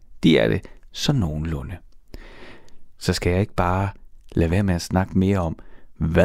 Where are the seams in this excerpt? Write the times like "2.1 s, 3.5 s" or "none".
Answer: 3.0 s